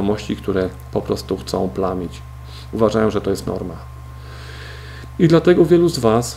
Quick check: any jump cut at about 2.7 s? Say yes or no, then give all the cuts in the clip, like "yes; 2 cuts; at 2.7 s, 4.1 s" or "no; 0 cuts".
no; 0 cuts